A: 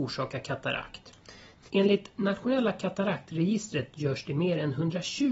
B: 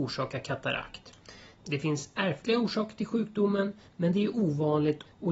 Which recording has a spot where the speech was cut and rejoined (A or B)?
A